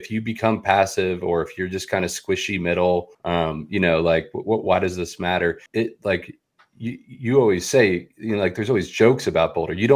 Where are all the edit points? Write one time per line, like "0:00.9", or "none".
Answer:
0:03.1
0:05.7